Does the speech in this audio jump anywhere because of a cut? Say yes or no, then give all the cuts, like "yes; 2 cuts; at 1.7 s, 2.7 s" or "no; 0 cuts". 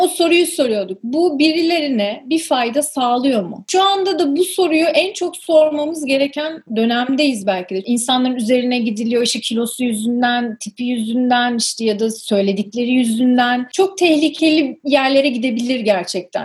no; 0 cuts